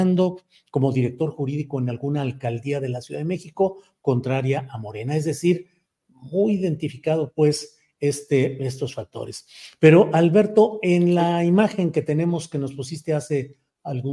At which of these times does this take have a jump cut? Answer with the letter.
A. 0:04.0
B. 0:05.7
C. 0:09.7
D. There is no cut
D